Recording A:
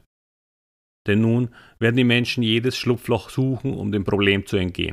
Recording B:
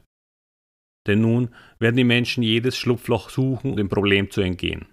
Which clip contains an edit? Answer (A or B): B